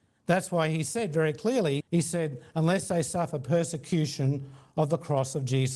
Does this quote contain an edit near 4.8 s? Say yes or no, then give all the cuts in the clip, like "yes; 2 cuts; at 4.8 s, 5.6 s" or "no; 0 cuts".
no; 1 cut; at 1.8 s